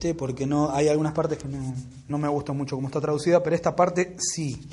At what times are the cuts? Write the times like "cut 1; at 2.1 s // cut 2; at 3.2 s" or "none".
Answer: none